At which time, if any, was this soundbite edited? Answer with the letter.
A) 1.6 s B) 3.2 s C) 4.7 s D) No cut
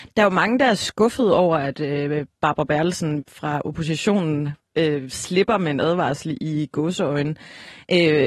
B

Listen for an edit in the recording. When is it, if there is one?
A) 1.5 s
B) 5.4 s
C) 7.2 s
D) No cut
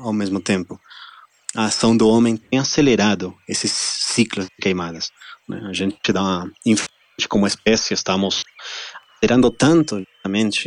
B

